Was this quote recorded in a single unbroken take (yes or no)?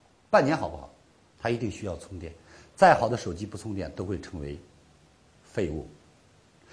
no